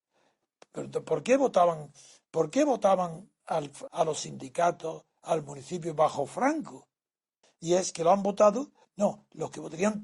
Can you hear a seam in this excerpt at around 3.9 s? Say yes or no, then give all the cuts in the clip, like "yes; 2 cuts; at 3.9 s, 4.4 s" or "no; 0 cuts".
yes; 3 cuts; at 3.9 s, 7.4 s, 8.8 s